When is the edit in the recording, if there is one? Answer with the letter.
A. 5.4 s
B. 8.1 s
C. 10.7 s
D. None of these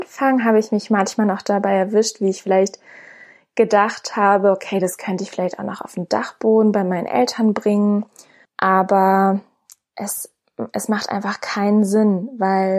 D